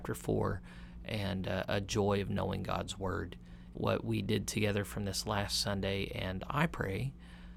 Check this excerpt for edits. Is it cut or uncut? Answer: cut